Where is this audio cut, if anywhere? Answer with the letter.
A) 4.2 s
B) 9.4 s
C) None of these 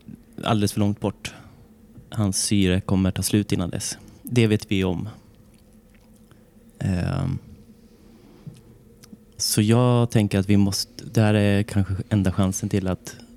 B